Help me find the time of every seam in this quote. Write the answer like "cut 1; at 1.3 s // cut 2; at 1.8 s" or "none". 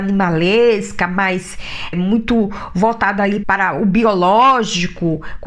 cut 1; at 1.9 s // cut 2; at 3.4 s